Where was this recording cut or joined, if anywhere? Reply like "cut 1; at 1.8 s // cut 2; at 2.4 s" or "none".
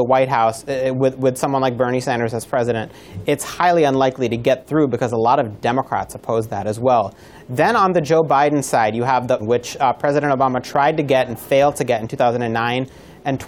cut 1; at 9.4 s

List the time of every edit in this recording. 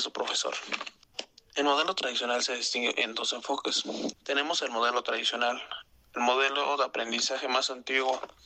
cut 1; at 4.1 s

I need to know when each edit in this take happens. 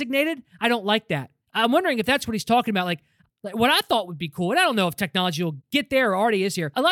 cut 1; at 1.4 s // cut 2; at 3.3 s

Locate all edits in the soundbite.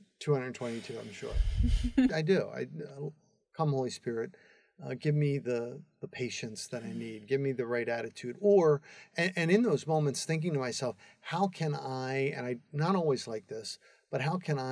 cut 1; at 2.1 s

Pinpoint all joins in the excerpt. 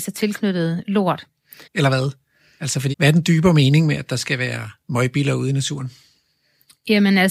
cut 1; at 1.6 s // cut 2; at 2.9 s // cut 3; at 4.8 s

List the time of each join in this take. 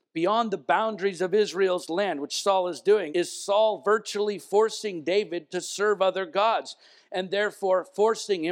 cut 1; at 3.1 s

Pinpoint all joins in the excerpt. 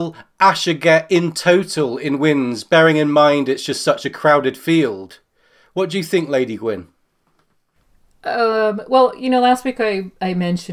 none

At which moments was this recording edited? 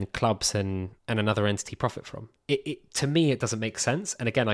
cut 1; at 1.0 s

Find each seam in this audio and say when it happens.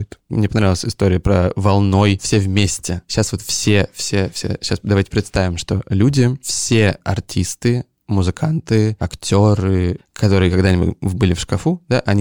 cut 1; at 10.0 s

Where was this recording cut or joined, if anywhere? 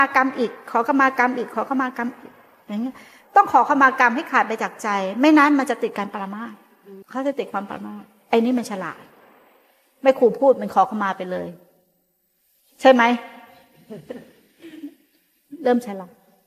cut 1; at 7.0 s

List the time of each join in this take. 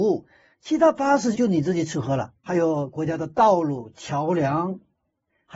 cut 1; at 1.3 s // cut 2; at 2.5 s

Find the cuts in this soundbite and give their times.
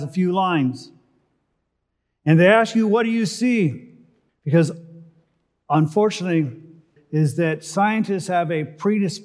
cut 1; at 4.3 s // cut 2; at 7.0 s

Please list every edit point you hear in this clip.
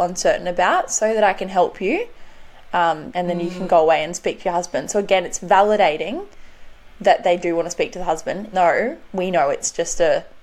cut 1; at 3.1 s // cut 2; at 8.5 s

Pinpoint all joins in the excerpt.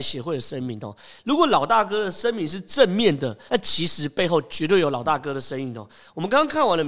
cut 1; at 1.2 s // cut 2; at 3.5 s

